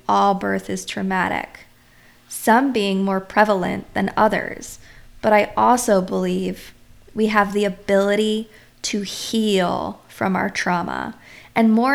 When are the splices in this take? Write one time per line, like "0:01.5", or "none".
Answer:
none